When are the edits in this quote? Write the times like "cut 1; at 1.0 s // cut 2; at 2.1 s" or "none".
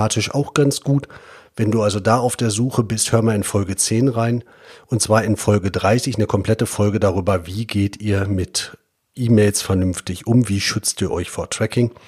cut 1; at 4.8 s